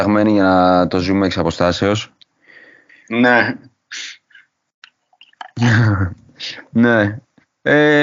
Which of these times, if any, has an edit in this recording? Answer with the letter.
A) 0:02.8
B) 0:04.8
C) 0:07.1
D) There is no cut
B